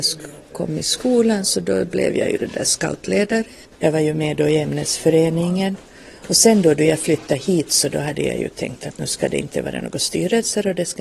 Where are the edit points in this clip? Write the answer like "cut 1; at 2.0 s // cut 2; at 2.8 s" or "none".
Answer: cut 1; at 3.8 s